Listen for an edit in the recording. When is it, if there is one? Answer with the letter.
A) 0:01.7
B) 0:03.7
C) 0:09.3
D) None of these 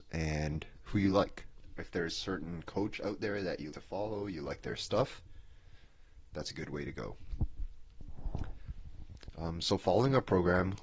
B